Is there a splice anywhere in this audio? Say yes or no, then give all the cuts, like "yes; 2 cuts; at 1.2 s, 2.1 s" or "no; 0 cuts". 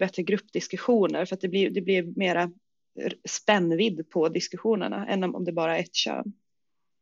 no; 0 cuts